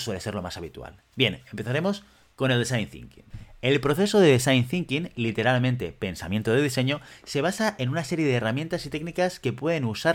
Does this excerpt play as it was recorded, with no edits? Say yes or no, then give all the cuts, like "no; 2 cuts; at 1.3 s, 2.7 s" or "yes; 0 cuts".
yes; 0 cuts